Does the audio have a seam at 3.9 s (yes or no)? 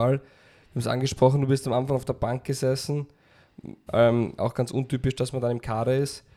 yes